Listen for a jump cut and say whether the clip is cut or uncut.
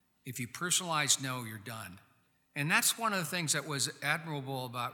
uncut